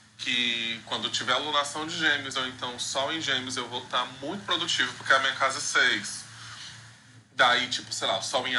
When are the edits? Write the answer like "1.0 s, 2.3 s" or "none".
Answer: none